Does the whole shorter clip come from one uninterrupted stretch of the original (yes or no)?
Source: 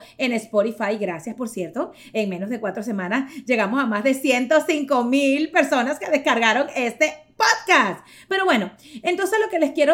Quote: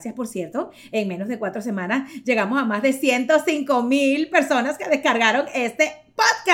yes